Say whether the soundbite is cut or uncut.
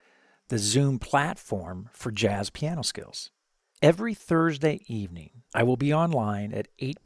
cut